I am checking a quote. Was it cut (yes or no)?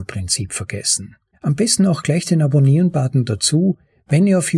yes